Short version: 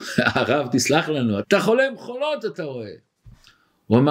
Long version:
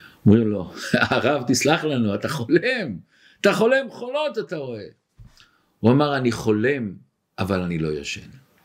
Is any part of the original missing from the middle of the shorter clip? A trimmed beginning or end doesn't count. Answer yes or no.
yes